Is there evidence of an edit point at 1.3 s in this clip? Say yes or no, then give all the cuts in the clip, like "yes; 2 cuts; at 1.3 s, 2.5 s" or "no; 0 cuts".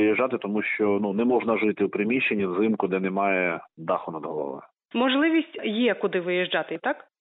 no; 1 cut; at 4.9 s